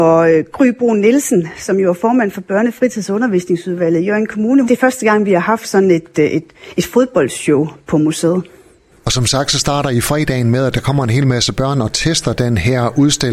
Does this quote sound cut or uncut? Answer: cut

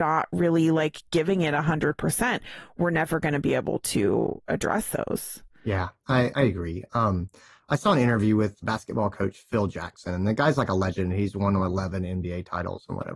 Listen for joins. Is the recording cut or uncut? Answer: cut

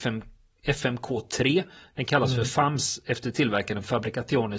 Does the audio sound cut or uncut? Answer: uncut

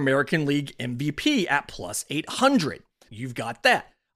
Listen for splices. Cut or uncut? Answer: uncut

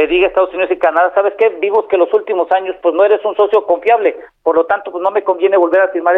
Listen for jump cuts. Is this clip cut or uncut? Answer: uncut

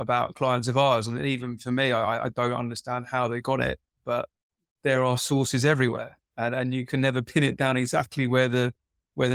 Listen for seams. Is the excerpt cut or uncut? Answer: uncut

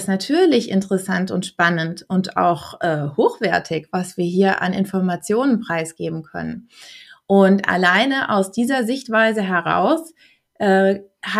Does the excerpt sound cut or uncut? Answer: uncut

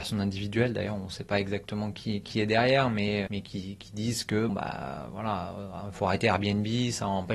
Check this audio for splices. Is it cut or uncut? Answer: cut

